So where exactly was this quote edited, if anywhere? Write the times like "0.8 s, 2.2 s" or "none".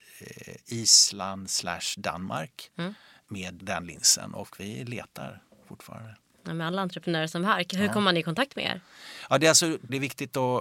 none